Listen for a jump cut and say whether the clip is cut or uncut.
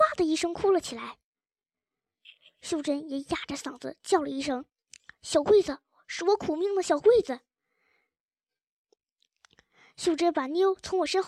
uncut